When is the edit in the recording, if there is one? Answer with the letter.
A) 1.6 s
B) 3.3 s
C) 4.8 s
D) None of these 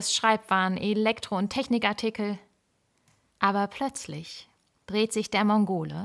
B